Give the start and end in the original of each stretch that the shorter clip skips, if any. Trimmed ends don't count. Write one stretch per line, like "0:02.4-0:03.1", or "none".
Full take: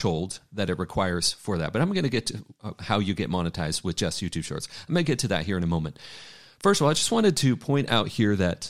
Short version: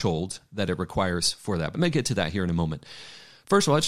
0:01.7-0:04.9